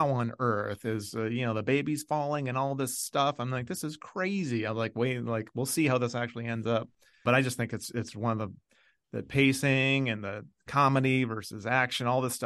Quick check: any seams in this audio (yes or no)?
no